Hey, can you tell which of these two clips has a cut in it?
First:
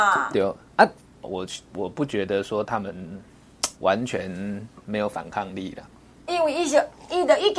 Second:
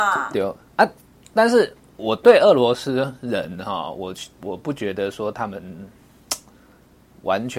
first; 3 cuts; at 1.2 s, 3.8 s, 6.3 s

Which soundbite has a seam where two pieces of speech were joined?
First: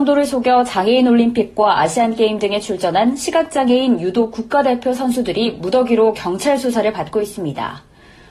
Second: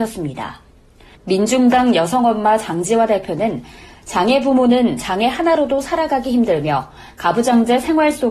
second; 1 cut; at 1.2 s

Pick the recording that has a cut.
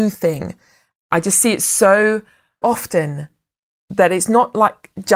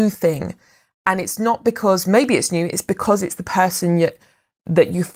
first; 2 cuts; at 0.9 s, 2.6 s

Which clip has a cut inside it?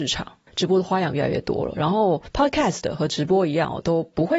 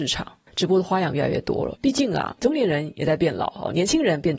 second; 1 cut; at 1.7 s

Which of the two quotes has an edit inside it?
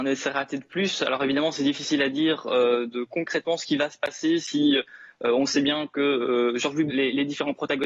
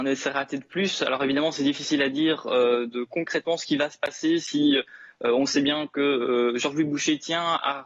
first; 1 cut; at 6.9 s

